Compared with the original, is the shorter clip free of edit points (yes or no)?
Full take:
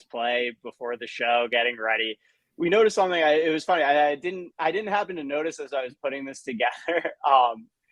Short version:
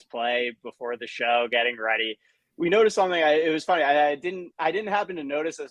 yes